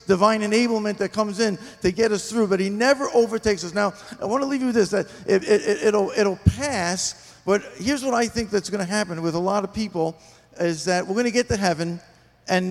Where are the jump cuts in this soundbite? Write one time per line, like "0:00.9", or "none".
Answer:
none